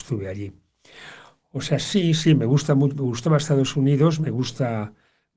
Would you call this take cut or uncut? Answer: uncut